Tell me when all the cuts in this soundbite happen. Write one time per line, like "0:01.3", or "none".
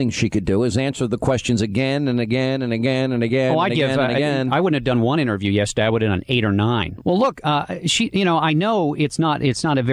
0:07.0

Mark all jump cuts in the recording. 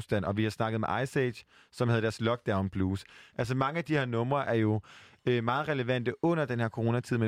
none

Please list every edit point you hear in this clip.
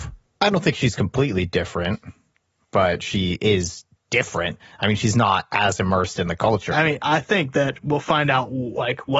0:06.7

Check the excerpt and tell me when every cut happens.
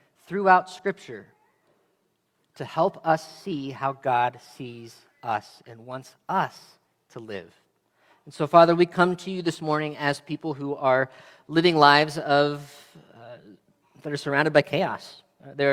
none

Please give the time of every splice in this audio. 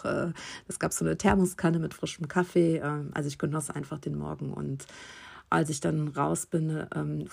none

